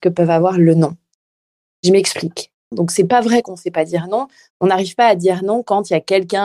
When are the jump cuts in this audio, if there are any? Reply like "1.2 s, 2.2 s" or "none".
2.7 s